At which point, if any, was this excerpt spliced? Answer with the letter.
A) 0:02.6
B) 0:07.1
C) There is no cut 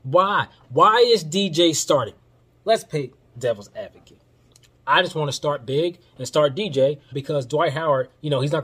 B